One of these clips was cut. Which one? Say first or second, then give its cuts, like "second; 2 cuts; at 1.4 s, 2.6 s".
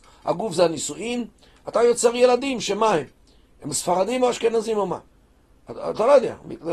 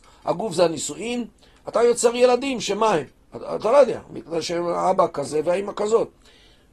second; 1 cut; at 3.2 s